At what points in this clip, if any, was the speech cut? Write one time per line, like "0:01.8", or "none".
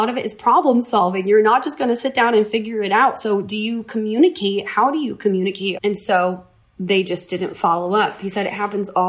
0:05.8